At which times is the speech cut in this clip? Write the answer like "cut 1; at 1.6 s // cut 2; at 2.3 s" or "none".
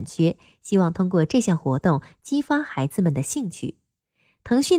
none